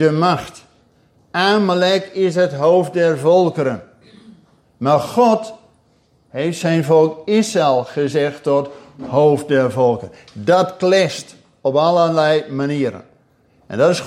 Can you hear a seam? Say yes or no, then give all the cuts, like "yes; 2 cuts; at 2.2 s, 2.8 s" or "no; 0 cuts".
no; 0 cuts